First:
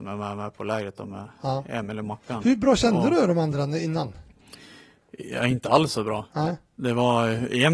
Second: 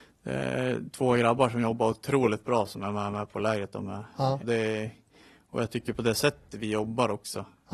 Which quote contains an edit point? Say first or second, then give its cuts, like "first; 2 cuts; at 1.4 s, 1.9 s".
second; 1 cut; at 4.4 s